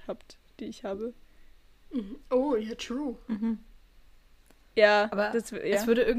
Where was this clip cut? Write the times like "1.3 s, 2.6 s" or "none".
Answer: none